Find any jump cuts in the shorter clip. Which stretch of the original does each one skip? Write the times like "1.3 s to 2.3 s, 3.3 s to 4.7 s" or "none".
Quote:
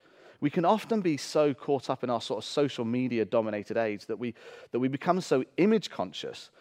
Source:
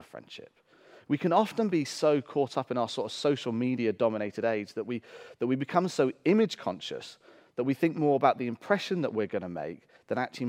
none